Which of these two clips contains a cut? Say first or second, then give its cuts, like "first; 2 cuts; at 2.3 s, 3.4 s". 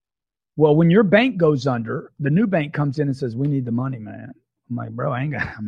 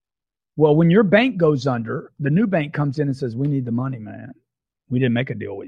first; 1 cut; at 4.6 s